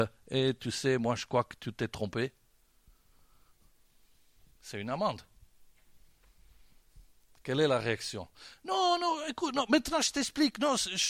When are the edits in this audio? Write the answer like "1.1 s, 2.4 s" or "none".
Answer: none